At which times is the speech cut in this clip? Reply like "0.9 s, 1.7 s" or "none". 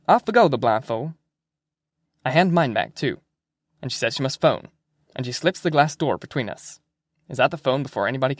2.1 s